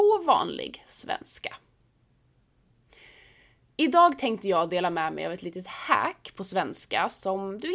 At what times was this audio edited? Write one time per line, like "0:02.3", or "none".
none